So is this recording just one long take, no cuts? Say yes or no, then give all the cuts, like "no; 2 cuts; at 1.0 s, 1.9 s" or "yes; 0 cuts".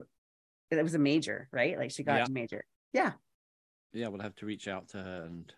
no; 1 cut; at 2.3 s